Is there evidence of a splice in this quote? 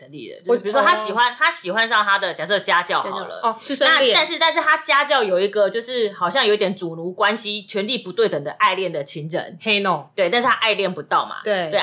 no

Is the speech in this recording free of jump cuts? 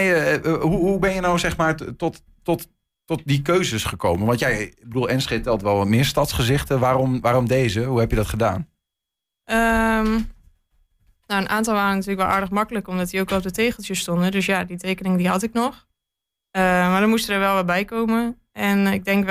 yes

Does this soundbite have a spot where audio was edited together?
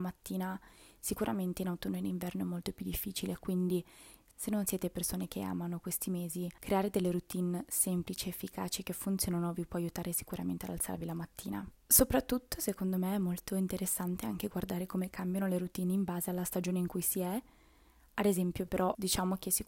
yes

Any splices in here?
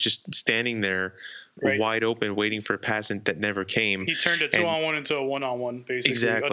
no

